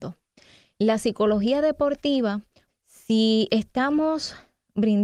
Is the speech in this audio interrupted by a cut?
yes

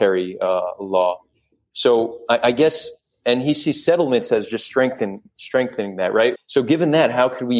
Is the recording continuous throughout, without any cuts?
no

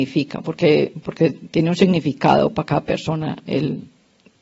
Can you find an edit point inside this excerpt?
yes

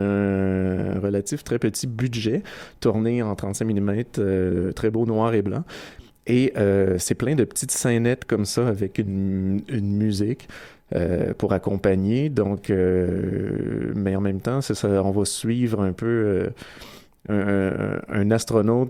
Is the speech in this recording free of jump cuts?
no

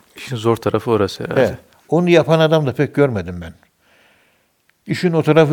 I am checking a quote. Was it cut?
no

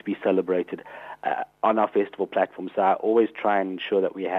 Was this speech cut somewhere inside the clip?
no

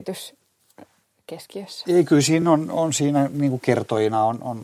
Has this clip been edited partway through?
no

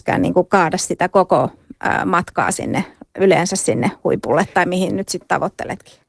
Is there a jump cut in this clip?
no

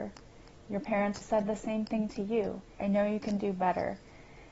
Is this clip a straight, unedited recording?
no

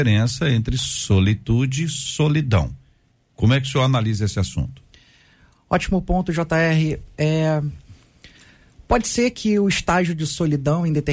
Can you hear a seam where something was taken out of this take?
no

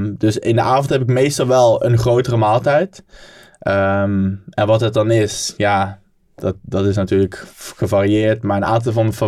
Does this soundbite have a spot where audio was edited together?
no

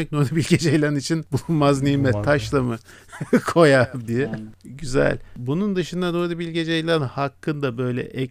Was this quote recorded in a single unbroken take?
yes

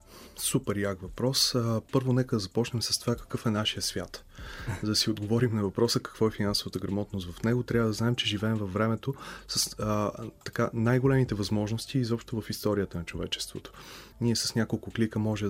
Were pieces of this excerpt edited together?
yes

